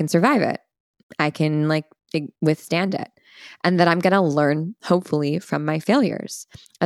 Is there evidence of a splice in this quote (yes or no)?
no